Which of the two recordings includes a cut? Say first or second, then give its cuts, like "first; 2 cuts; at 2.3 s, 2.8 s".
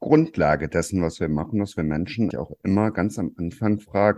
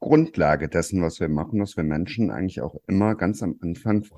first; 1 cut; at 2.3 s